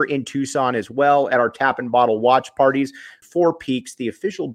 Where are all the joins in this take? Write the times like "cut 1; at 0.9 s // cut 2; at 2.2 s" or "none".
cut 1; at 3.2 s